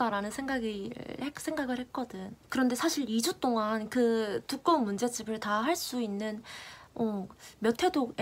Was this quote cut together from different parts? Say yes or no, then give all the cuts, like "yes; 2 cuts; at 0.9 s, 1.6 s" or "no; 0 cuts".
yes; 1 cut; at 2.5 s